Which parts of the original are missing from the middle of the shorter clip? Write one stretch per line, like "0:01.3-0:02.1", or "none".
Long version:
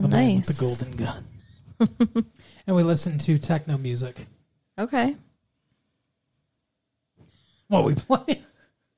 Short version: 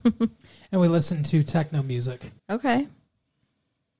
0:04.3-0:04.7